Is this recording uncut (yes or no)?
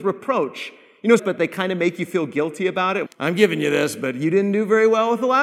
no